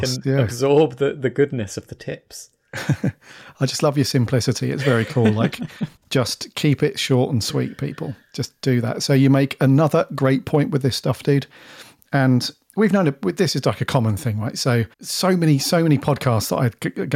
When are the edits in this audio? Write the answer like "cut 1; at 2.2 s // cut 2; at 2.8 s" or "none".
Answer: cut 1; at 14.9 s